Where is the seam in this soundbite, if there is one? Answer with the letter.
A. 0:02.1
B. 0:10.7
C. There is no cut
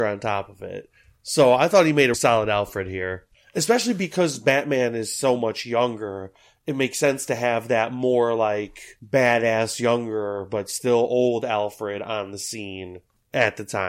A